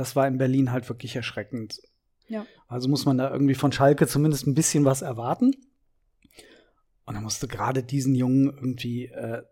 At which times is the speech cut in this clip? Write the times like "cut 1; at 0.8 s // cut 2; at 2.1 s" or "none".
cut 1; at 2.2 s